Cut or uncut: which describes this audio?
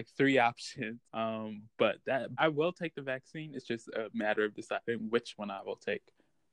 cut